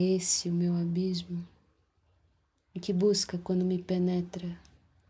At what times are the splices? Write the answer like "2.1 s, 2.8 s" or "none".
none